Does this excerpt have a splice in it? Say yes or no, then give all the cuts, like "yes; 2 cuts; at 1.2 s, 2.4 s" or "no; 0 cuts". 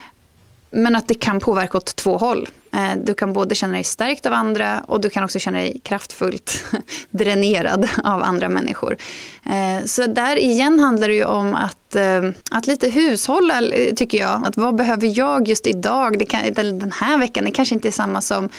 yes; 2 cuts; at 12.4 s, 14.4 s